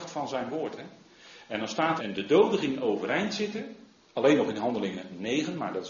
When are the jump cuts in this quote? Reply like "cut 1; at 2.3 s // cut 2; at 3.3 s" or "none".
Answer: cut 1; at 2.0 s // cut 2; at 4.0 s